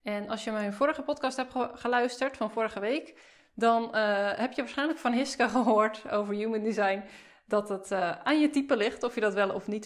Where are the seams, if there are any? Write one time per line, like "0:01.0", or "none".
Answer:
none

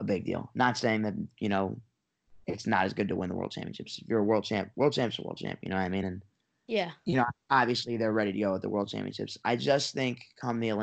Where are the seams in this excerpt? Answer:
none

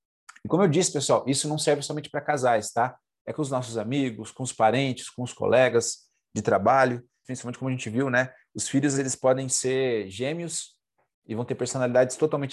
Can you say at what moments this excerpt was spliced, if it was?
0:07.2
0:08.9

